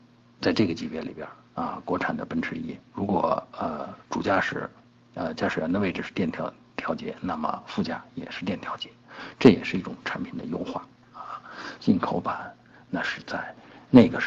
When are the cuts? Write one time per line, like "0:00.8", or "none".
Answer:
0:11.8